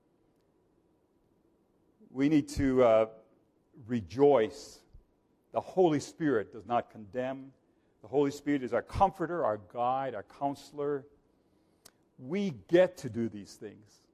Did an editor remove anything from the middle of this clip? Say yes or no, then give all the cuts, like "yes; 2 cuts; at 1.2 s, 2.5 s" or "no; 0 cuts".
no; 0 cuts